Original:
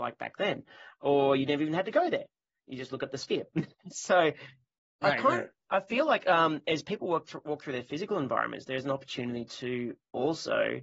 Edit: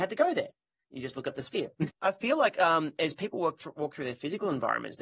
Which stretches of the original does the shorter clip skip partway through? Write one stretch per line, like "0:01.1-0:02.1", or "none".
0:03.7-0:05.6